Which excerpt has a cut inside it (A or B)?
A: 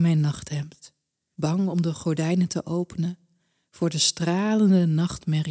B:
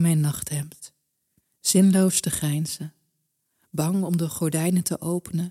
A